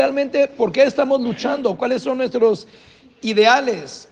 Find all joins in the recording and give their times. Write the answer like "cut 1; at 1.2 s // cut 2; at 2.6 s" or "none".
none